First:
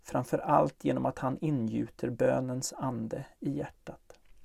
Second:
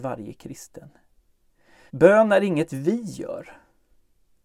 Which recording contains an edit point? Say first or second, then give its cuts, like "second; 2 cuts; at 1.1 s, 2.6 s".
second; 1 cut; at 1.9 s